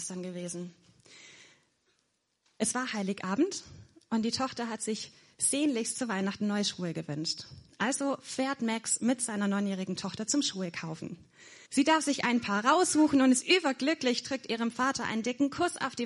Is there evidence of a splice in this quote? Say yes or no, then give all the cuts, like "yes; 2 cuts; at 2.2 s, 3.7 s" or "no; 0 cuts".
yes; 1 cut; at 11.7 s